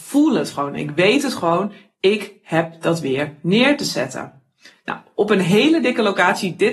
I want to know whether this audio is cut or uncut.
uncut